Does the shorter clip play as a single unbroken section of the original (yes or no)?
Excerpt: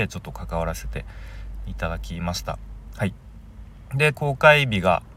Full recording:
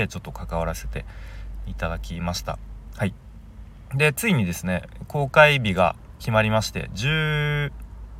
no